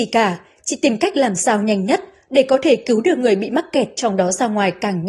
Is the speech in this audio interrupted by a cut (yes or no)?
no